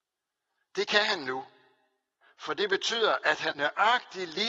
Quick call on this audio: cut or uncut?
cut